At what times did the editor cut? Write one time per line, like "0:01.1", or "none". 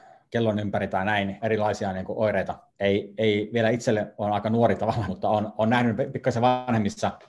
0:01.4
0:02.7
0:05.1

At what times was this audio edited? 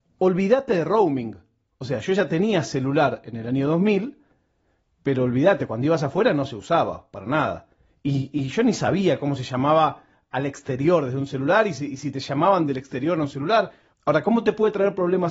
0:13.9

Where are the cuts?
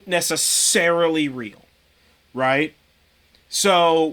none

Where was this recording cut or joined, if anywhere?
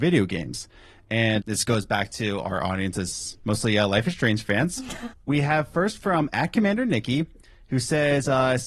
0:01.4
0:05.1

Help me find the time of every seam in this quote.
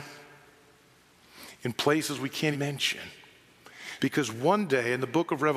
0:02.5
0:04.0

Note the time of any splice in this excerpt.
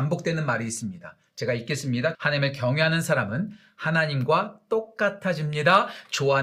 0:02.1

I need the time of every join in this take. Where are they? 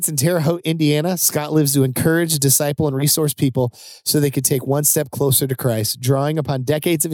none

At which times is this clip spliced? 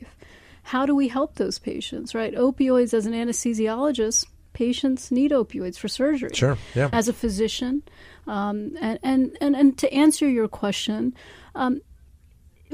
0:06.9

